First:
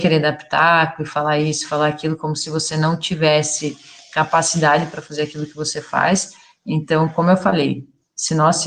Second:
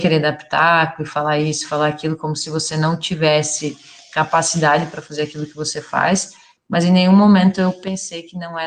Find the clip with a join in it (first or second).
second